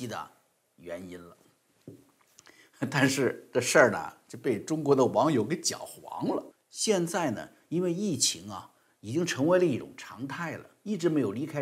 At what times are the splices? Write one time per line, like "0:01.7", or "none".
0:06.5